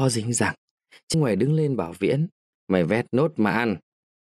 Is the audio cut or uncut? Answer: cut